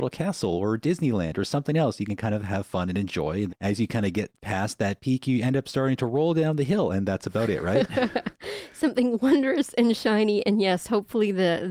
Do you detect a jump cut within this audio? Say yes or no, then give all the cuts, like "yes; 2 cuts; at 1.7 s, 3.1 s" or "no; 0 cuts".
yes; 1 cut; at 3.5 s